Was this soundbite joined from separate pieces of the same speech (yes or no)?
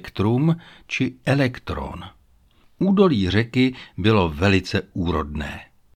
no